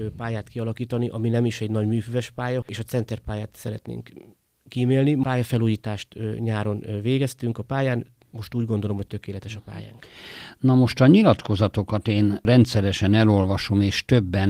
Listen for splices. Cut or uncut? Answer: cut